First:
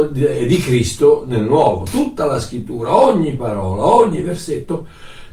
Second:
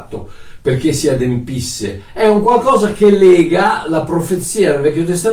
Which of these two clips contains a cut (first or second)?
second